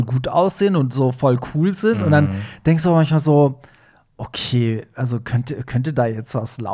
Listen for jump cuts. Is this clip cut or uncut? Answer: uncut